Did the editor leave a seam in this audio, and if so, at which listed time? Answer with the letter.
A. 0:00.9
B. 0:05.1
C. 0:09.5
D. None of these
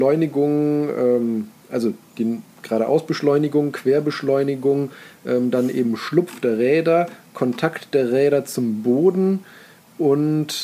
D